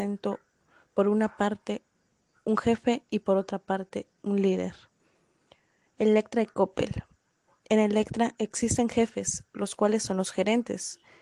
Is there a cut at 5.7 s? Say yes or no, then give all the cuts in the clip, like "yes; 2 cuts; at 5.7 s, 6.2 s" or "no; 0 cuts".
no; 0 cuts